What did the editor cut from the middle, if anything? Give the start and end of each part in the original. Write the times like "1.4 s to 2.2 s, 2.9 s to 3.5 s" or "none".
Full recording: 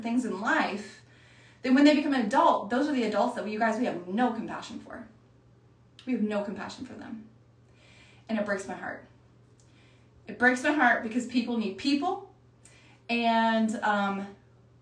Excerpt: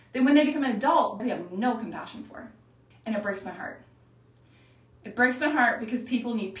2.7 s to 3.8 s, 5.5 s to 8.1 s